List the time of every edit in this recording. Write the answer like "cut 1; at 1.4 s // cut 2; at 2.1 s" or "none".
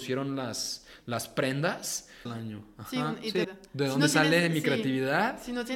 cut 1; at 2.3 s // cut 2; at 3.4 s